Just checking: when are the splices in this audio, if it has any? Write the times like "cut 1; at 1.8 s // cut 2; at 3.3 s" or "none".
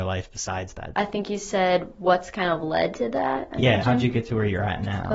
cut 1; at 0.9 s // cut 2; at 3.8 s